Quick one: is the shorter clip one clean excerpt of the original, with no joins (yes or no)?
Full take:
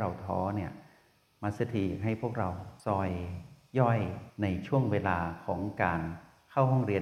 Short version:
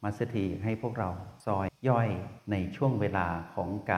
no